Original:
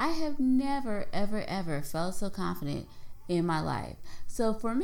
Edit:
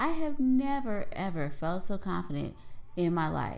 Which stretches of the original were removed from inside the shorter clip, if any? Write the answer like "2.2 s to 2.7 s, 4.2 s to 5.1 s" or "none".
1.1 s to 1.4 s